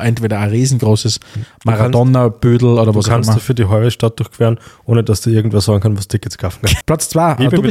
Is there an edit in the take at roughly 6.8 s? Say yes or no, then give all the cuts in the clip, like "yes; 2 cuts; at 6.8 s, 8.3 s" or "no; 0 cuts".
yes; 1 cut; at 6.8 s